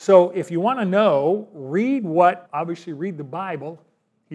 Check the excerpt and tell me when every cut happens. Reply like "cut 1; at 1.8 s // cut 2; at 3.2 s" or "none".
cut 1; at 2.5 s